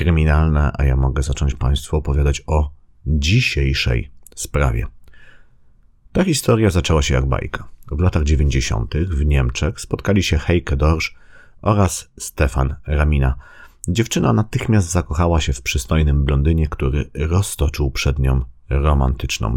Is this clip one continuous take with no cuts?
yes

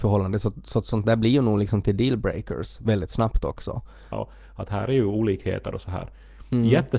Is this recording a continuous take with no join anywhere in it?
no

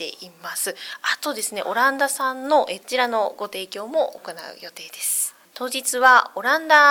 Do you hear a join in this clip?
yes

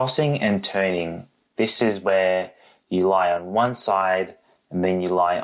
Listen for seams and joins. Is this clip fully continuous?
yes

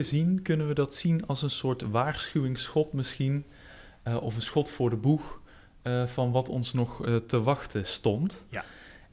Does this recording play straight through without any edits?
yes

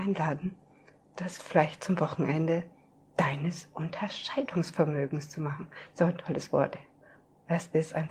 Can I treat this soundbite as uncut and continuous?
yes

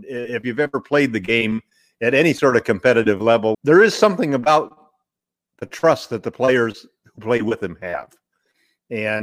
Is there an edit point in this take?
yes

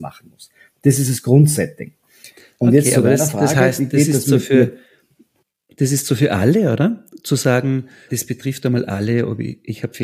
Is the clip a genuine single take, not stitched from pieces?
no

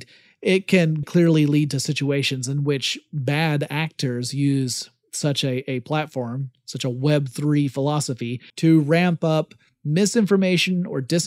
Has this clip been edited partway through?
yes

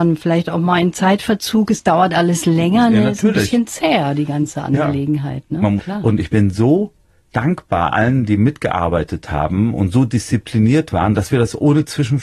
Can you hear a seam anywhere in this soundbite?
yes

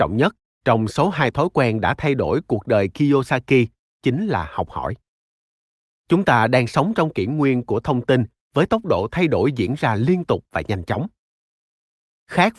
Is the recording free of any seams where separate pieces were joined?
yes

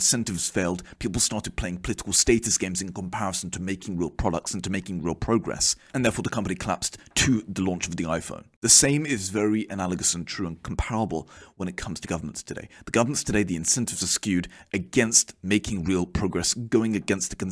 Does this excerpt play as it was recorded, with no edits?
yes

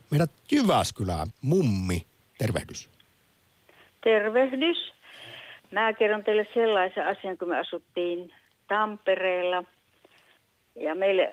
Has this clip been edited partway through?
yes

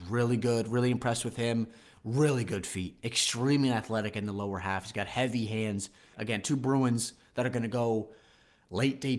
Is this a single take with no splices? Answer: no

